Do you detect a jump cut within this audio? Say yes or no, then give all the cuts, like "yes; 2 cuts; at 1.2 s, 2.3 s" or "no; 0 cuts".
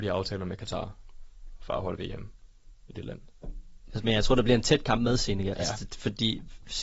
yes; 2 cuts; at 3.9 s, 5.5 s